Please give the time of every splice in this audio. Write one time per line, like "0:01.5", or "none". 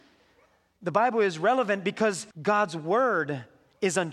0:02.3